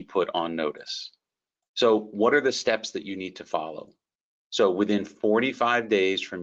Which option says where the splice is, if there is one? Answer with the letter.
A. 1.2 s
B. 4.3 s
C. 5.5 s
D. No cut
B